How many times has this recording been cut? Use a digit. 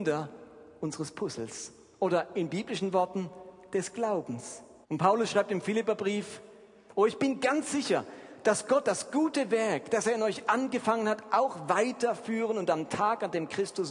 1